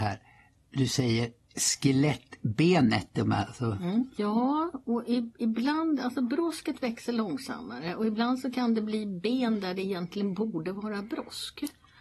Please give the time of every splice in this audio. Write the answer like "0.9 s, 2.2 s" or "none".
4.2 s